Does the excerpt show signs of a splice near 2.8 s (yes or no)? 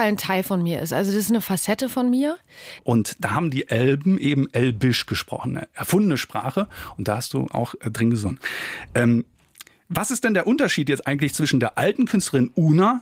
yes